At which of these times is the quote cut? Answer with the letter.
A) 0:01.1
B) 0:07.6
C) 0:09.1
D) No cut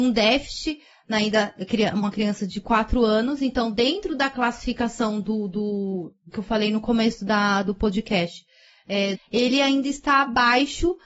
C